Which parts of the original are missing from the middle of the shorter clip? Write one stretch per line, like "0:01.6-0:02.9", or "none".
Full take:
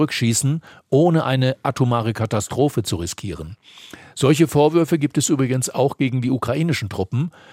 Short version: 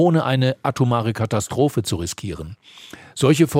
none